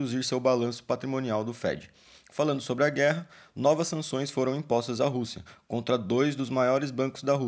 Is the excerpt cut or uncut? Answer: uncut